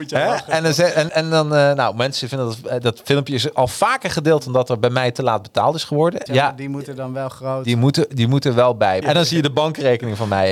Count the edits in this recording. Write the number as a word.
three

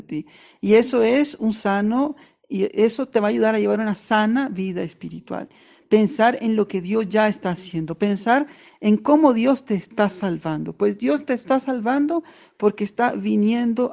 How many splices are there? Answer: one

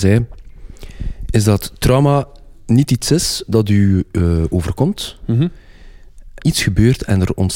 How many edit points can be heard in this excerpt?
one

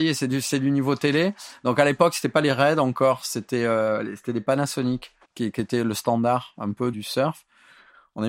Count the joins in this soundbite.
two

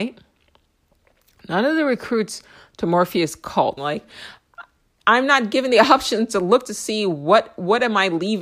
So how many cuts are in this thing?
one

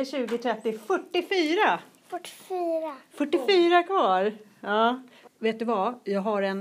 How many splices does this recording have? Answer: one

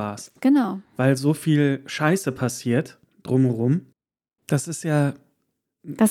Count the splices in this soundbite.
one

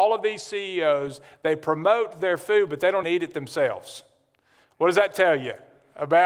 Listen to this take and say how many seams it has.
one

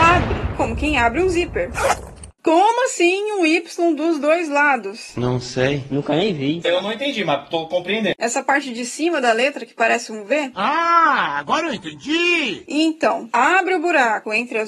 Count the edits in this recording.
three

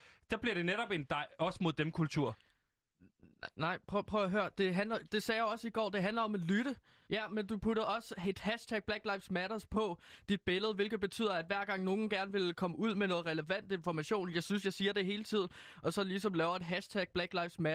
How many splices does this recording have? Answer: one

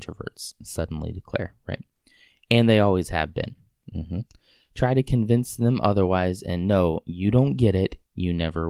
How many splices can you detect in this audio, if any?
zero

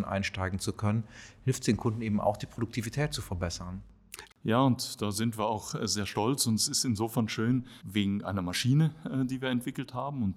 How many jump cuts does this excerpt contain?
two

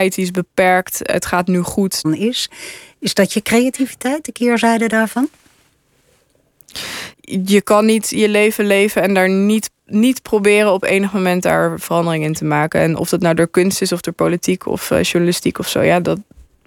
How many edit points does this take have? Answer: two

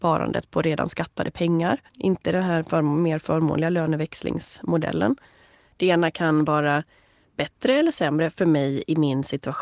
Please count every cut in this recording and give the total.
two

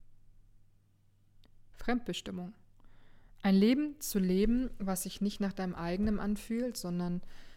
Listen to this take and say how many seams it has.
zero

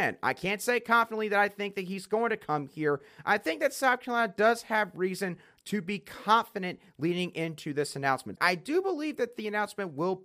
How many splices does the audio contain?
one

